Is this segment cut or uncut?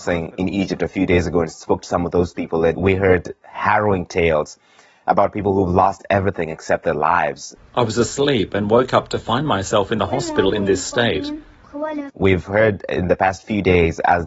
cut